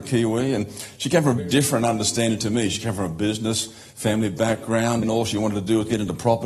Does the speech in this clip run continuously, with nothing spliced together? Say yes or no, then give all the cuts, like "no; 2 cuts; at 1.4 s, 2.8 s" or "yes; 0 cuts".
no; 2 cuts; at 1.4 s, 5.0 s